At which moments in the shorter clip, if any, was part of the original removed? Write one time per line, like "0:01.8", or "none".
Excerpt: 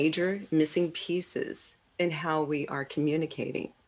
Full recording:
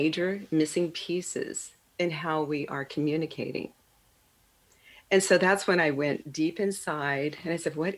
none